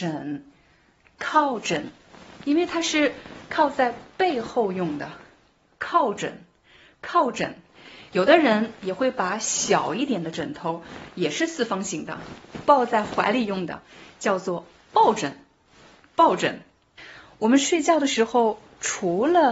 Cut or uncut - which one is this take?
uncut